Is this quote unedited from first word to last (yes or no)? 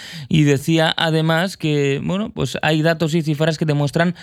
yes